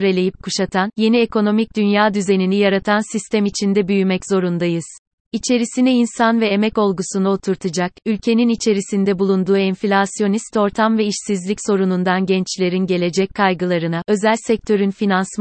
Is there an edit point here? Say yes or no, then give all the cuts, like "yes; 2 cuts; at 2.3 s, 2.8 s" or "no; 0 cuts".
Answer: yes; 2 cuts; at 5.2 s, 14.0 s